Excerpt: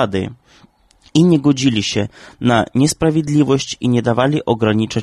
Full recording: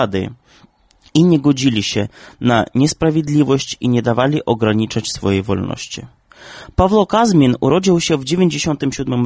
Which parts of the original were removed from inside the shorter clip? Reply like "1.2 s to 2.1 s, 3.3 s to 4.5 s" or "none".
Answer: none